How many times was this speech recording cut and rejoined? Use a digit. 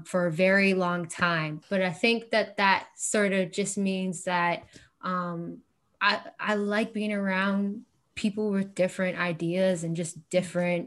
1